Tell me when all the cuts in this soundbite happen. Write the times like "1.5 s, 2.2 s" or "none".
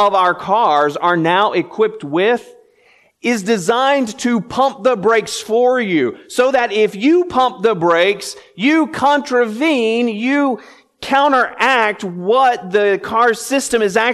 none